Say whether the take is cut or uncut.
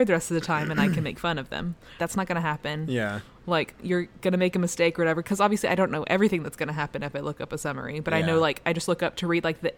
cut